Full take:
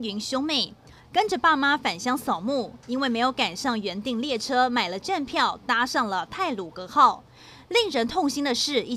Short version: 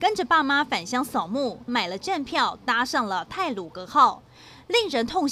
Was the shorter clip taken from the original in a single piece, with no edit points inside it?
no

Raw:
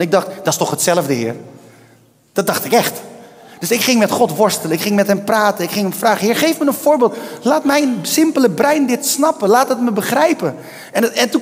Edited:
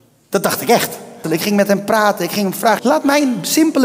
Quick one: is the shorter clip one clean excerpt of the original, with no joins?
no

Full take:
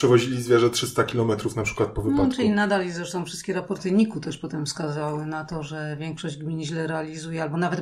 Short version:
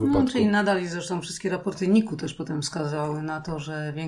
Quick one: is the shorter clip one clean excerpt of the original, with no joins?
yes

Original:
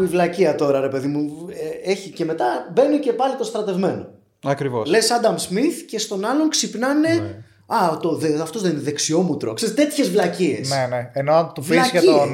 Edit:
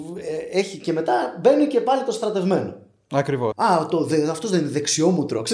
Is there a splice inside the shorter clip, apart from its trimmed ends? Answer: yes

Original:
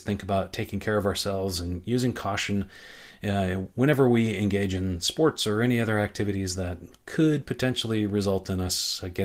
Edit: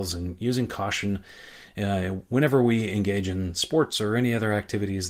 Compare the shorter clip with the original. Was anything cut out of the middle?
no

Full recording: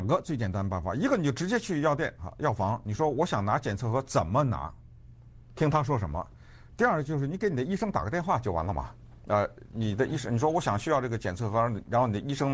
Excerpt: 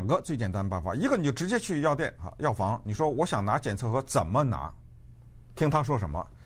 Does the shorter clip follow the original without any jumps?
yes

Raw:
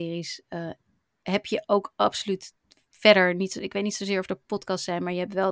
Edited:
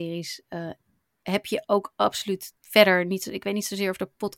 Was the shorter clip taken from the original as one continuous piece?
no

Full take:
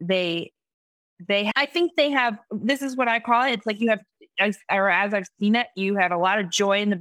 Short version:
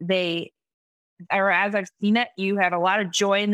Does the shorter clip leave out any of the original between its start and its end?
yes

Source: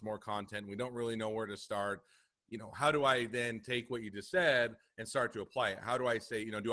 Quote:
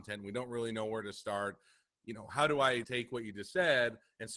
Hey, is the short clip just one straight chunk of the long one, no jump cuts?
no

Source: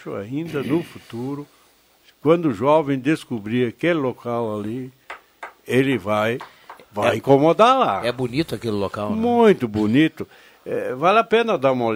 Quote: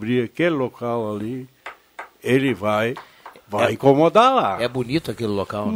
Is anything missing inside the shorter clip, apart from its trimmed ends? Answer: no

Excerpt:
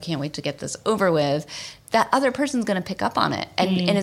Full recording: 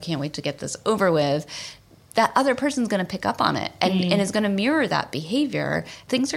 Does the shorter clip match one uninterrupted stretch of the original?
no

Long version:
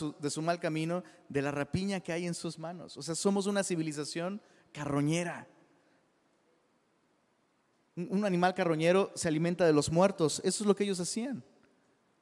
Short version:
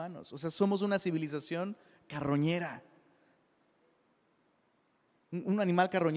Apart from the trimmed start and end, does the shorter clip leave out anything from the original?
no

